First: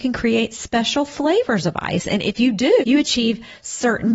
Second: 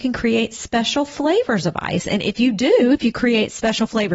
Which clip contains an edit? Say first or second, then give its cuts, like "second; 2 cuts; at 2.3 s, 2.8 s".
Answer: first; 1 cut; at 2.8 s